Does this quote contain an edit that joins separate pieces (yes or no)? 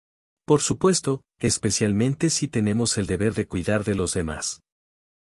yes